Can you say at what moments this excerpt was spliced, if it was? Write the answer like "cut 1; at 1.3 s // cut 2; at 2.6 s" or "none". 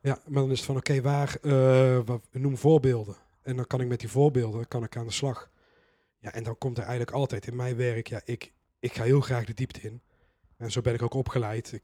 cut 1; at 2.3 s

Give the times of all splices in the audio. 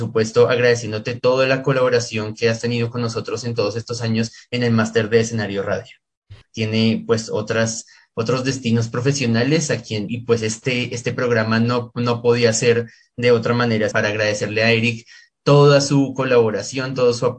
cut 1; at 6.4 s // cut 2; at 10.1 s // cut 3; at 13.9 s

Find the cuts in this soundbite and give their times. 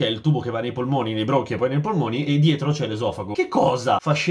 cut 1; at 2.3 s

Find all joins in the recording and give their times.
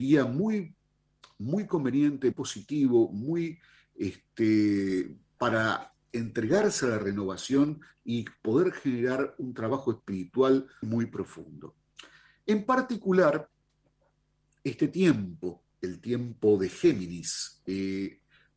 cut 1; at 2.3 s // cut 2; at 10.8 s

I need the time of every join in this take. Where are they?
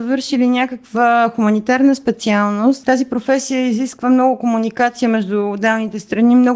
cut 1; at 2.8 s

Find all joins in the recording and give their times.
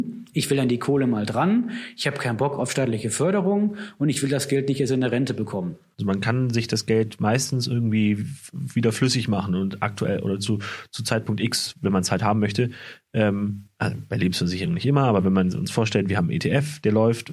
cut 1; at 5.9 s

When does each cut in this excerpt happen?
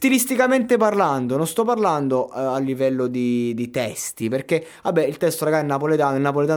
none

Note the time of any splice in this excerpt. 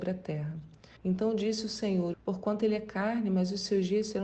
cut 1; at 1.0 s // cut 2; at 2.1 s

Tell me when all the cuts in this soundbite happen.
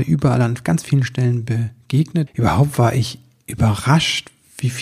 cut 1; at 2.3 s

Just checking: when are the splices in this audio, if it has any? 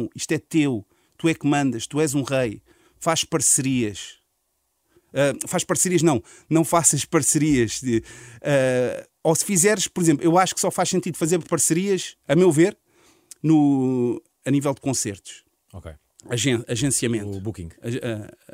cut 1; at 9.2 s

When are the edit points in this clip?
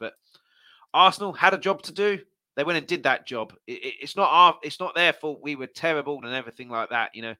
cut 1; at 6.2 s

